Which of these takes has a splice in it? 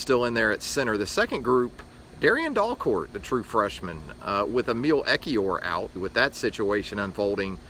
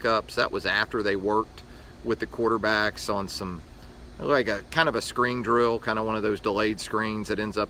first; 1 cut; at 6.0 s

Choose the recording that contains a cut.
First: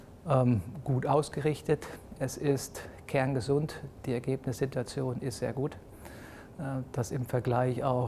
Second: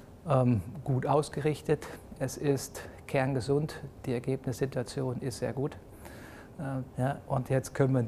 second; 1 cut; at 6.9 s

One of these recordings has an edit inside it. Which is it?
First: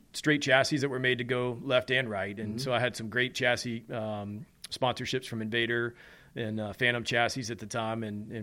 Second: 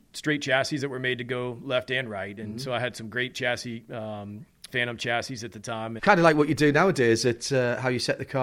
second; 2 cuts; at 4.7 s, 6.0 s

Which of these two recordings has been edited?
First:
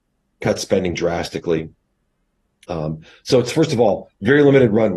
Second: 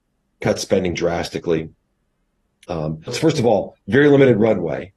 second; 1 cut; at 3.1 s

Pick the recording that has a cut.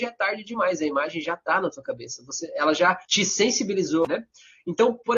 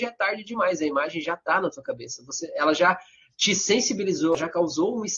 first; 2 cuts; at 3.1 s, 4.1 s

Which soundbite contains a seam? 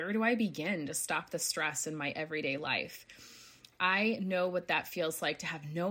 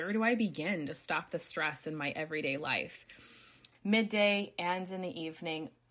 second; 1 cut; at 3.7 s

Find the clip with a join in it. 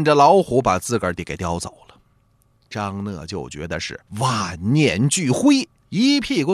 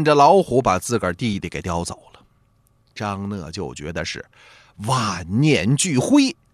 first; 2 cuts; at 1.2 s, 4.1 s

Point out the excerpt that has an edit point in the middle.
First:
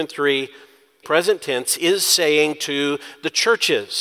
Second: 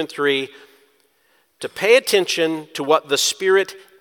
first; 1 cut; at 1.0 s

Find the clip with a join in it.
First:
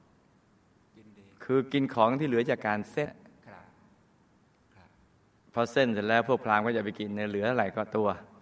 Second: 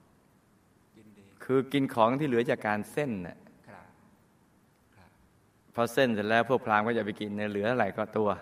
first; 1 cut; at 3.1 s

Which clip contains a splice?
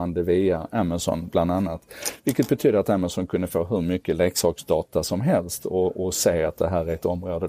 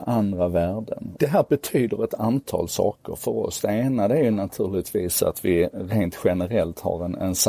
second; 1 cut; at 1.1 s

